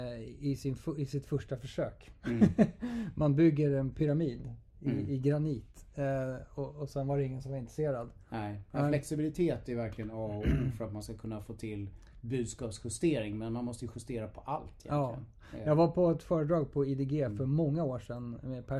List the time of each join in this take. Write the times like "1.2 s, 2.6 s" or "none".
none